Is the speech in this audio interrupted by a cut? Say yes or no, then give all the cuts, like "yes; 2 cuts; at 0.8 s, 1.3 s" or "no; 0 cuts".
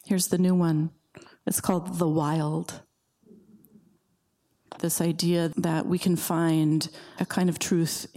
yes; 1 cut; at 4.8 s